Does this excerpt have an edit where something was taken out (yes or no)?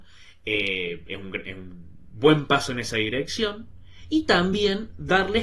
yes